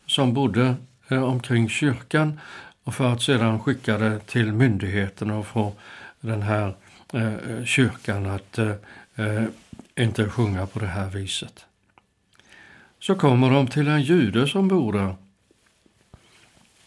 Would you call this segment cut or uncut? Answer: uncut